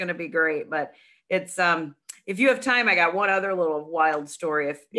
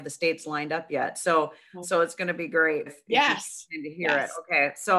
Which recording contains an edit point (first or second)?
second